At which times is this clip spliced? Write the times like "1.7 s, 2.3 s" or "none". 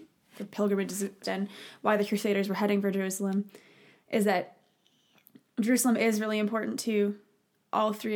1.2 s